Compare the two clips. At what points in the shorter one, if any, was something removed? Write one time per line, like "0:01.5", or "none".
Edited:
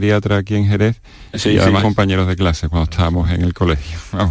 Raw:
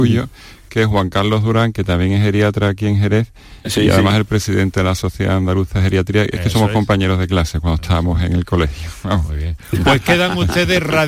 0:01.8